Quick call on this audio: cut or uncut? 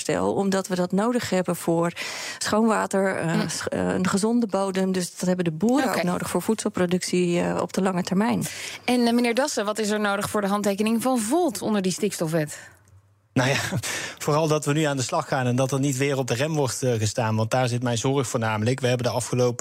uncut